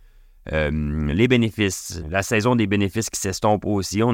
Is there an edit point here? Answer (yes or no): yes